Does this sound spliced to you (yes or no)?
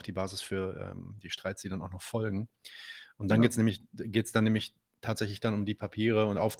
no